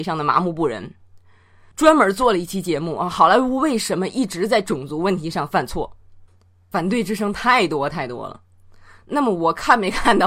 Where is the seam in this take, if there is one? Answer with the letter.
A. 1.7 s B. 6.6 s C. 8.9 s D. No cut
A